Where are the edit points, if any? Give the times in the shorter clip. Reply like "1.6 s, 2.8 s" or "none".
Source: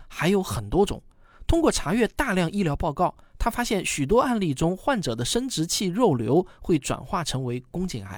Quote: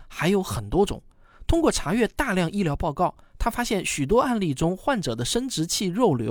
none

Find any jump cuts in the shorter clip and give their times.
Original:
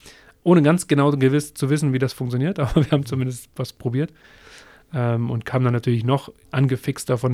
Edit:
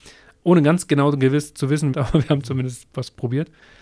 1.9 s

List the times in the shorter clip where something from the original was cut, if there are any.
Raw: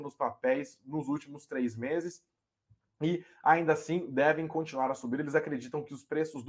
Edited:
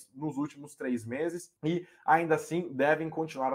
1.6 s

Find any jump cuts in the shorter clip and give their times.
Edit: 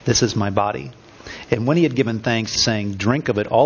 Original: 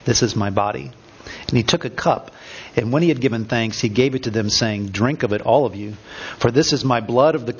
1.4 s, 2.6 s

